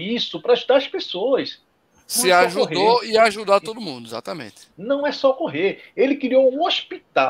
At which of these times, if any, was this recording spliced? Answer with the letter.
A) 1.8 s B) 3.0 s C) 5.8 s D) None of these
D